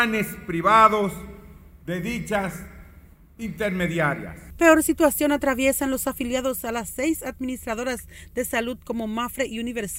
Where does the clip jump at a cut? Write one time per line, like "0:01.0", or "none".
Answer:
none